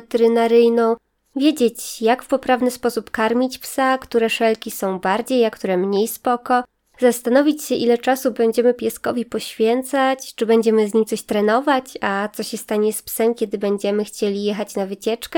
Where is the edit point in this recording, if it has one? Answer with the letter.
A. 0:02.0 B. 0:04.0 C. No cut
C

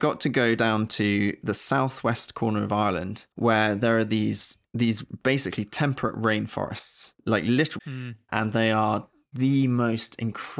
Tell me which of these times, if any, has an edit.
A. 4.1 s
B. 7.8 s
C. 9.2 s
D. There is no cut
B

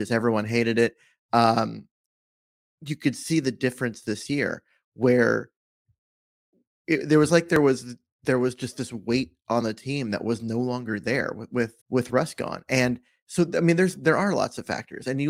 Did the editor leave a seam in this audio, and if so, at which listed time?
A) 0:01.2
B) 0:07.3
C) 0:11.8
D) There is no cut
C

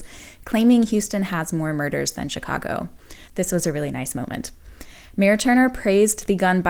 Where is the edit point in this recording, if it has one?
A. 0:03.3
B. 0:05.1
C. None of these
A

